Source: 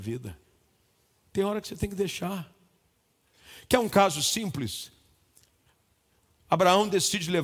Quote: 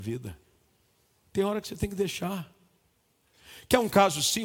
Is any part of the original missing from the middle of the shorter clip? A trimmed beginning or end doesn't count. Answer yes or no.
no